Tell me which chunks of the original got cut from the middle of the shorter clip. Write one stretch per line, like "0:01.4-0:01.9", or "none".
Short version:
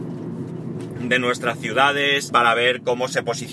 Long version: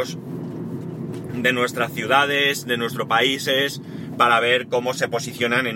0:02.6-0:04.2